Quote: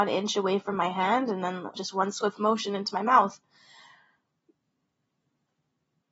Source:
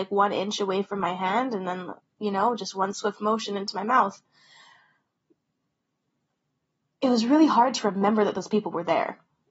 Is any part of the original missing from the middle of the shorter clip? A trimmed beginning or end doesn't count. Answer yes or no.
yes